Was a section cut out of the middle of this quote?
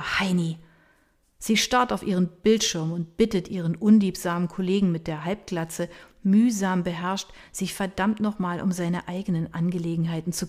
no; 0 cuts

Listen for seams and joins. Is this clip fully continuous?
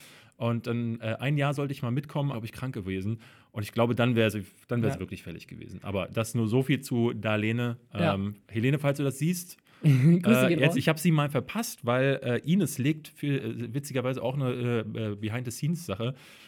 no; 2 cuts; at 2.3 s, 10.7 s

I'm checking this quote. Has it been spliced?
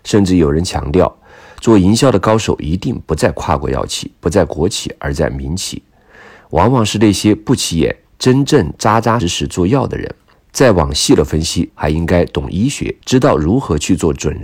yes; 3 cuts; at 9.2 s, 11.7 s, 13.0 s

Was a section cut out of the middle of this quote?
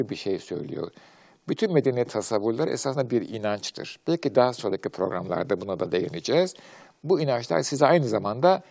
no; 0 cuts

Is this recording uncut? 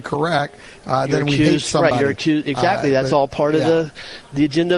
yes; 0 cuts

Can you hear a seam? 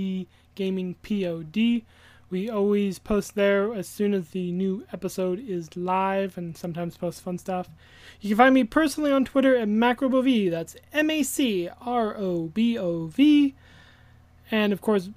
no; 0 cuts

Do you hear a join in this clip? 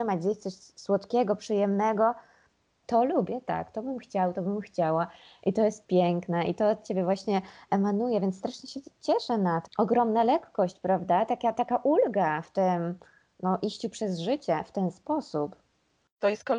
yes; 2 cuts; at 2.8 s, 9.7 s

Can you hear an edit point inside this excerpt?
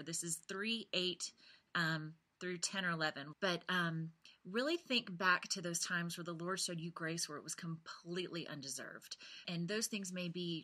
yes; 2 cuts; at 3.3 s, 9.4 s

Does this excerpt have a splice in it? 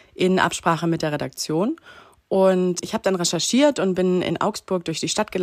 no; 0 cuts

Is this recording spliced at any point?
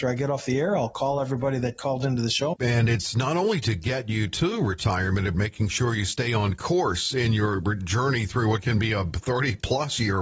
yes; 2 cuts; at 2.5 s, 5.3 s

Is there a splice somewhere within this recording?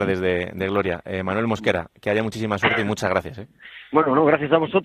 no; 0 cuts

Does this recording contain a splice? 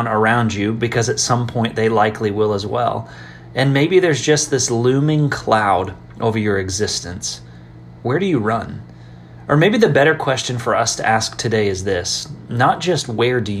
no; 0 cuts

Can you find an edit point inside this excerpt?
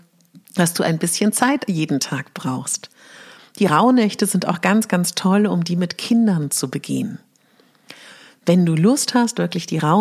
no; 0 cuts

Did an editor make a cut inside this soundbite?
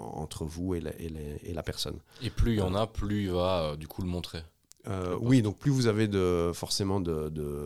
no; 0 cuts

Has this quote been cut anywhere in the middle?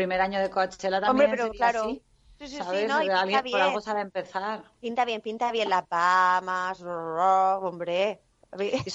no; 0 cuts

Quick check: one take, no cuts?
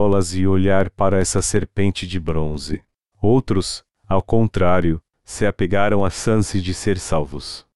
no; 1 cut; at 3.1 s

